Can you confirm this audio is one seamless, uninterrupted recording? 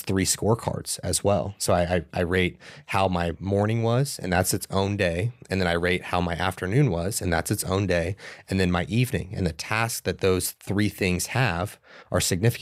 yes; 0 cuts

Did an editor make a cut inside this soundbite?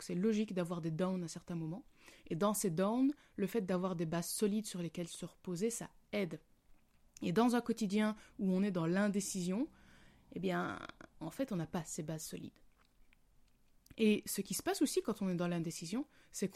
no; 0 cuts

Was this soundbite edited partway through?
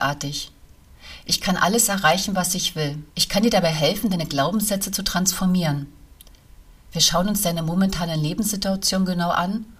yes; 1 cut; at 3.1 s

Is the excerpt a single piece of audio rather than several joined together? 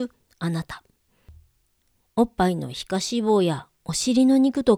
no; 1 cut; at 2.0 s

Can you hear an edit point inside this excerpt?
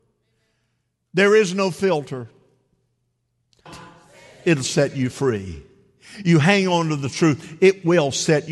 yes; 1 cut; at 3.7 s

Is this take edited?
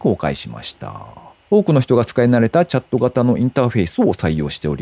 yes; 1 cut; at 1.3 s

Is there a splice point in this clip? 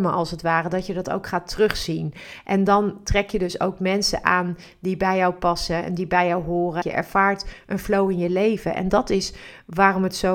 yes; 1 cut; at 6.8 s

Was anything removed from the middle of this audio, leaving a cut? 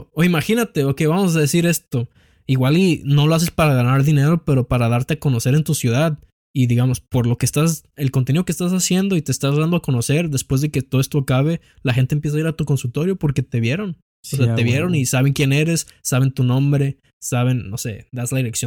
no; 0 cuts

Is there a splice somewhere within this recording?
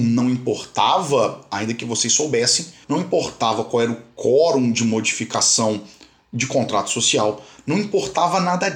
yes; 1 cut; at 2.8 s

